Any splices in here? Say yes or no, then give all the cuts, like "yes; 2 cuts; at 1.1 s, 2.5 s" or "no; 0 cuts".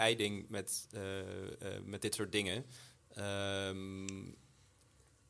no; 0 cuts